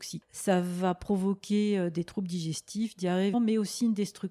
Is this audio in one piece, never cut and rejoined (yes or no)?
no